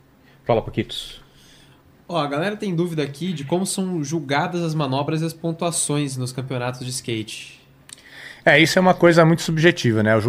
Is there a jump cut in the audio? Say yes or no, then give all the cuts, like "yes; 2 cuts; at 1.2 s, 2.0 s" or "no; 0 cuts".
no; 0 cuts